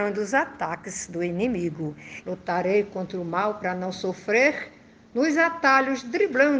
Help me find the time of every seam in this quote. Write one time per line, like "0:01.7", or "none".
0:02.2